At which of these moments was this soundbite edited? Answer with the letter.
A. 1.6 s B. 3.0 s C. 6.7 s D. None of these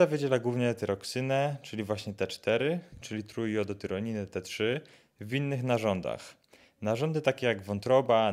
B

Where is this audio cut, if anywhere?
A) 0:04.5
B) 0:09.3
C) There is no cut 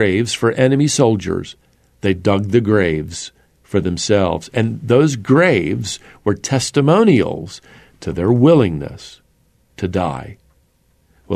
C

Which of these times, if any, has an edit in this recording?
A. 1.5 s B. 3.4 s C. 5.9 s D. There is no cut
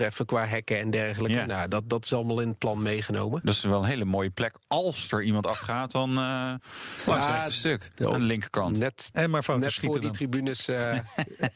B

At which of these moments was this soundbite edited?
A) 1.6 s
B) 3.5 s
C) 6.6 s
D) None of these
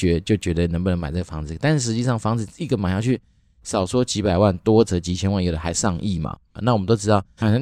C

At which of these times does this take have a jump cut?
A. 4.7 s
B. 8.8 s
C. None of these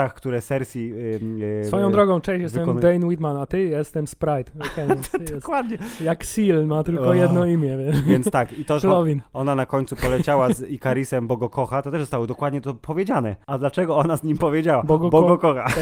B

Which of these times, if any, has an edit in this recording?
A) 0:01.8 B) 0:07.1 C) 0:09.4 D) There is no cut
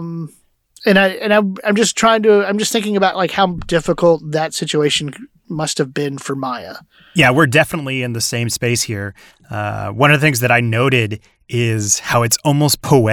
D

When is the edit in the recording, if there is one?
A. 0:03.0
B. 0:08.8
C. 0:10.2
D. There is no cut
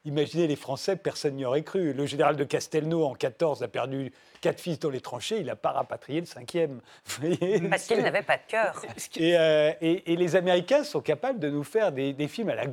B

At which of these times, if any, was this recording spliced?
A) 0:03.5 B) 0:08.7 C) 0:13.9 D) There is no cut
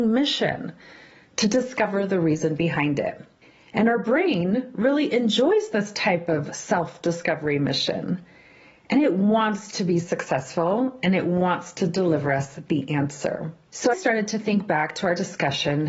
C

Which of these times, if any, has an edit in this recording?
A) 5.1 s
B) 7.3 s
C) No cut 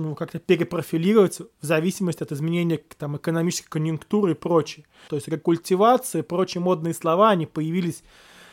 A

